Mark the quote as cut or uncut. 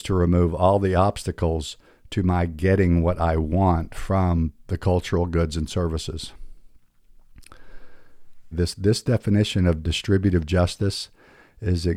cut